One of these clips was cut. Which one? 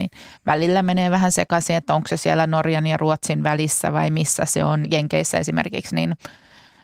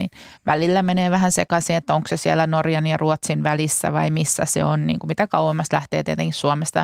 first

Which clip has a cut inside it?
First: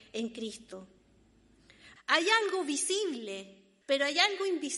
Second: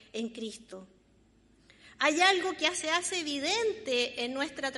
first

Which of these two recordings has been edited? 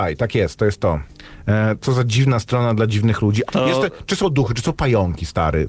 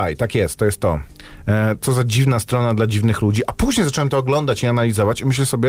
first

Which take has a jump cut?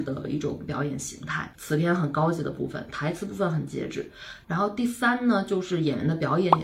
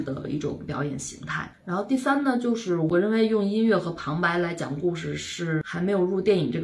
first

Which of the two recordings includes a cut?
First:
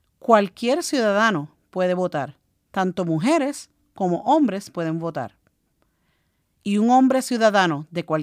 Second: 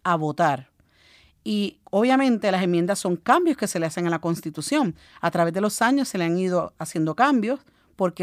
second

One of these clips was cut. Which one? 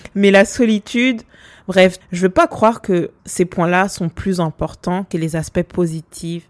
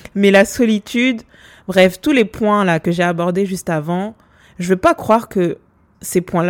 first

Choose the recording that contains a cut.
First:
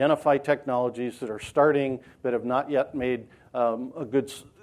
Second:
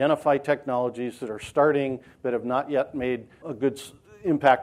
second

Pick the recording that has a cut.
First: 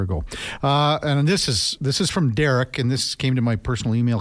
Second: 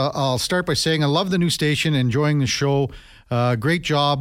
first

